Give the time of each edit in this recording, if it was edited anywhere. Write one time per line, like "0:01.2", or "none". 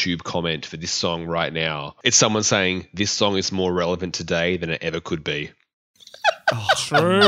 0:02.0

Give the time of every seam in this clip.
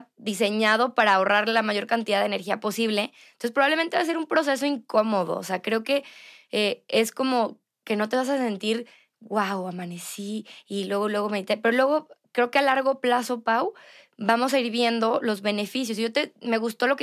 none

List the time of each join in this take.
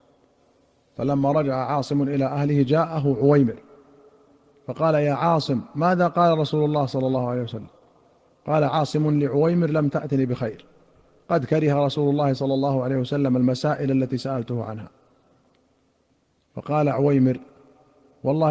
none

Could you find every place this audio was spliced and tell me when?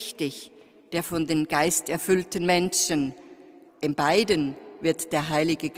0:03.7

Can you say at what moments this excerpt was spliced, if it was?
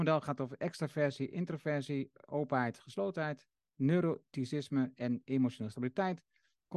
none

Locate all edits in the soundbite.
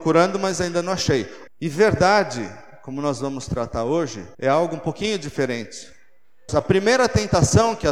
0:01.5
0:04.3
0:06.5

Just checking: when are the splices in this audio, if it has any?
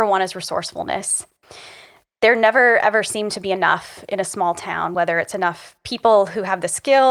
none

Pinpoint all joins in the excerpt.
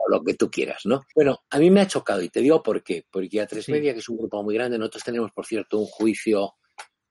0:01.1

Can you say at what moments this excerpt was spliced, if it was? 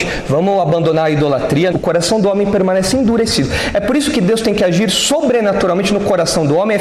0:01.7

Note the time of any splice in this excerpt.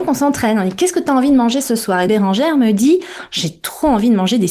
0:02.1

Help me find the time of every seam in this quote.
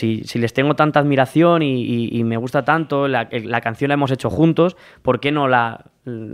none

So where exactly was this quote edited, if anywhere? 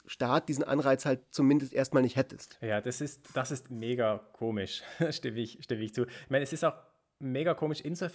none

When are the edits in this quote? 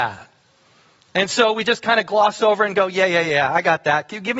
none

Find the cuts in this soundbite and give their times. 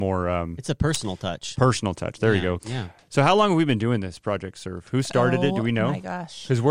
0:02.6

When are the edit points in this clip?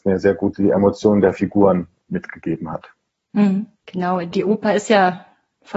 0:03.8

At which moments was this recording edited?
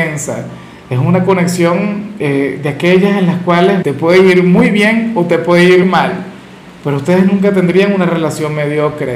0:03.8
0:05.8

